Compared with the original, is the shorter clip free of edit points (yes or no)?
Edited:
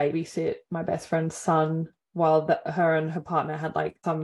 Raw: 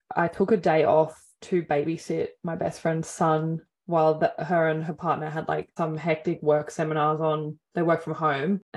yes